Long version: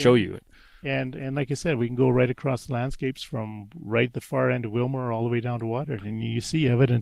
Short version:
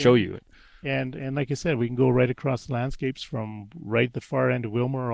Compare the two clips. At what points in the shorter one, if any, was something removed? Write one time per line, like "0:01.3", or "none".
none